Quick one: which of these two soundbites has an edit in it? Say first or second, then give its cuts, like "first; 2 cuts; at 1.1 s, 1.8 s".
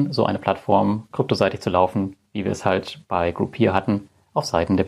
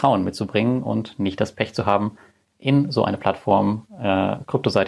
first; 2 cuts; at 1.1 s, 2.3 s